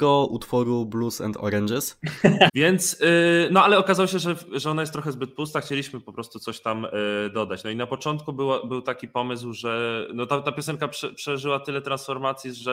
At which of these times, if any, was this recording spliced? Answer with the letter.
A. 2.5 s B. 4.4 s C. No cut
A